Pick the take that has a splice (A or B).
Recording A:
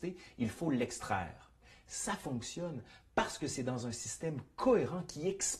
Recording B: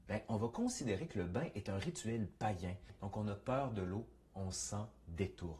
B